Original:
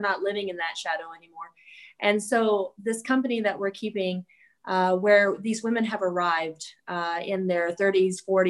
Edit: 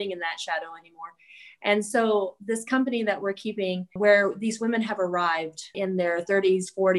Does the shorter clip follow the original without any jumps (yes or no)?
no